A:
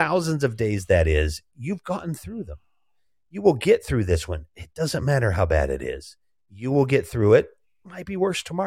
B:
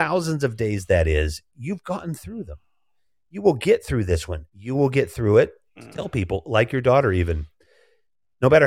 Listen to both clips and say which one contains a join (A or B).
B